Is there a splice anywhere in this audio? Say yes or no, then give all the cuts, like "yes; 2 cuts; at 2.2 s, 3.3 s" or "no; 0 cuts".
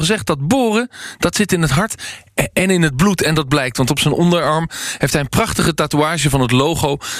no; 0 cuts